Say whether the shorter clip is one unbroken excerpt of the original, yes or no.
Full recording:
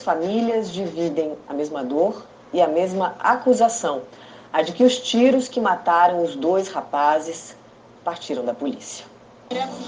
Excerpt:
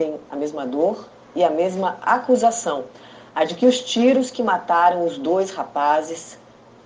yes